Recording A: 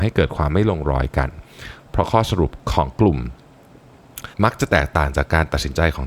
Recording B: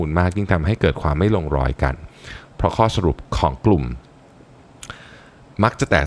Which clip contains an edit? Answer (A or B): A